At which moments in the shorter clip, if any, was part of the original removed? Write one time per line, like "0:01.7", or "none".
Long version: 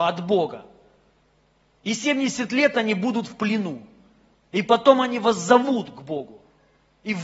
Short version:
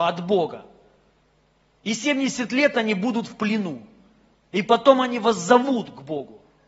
none